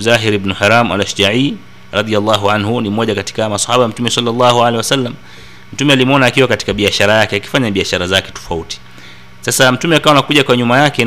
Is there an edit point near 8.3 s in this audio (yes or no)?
yes